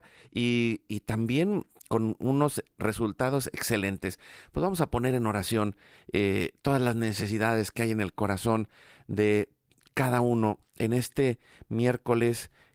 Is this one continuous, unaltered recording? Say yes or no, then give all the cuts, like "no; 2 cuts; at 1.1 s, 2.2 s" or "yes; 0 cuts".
yes; 0 cuts